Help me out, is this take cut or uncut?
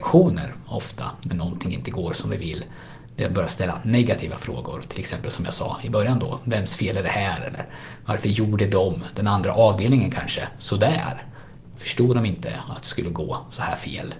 uncut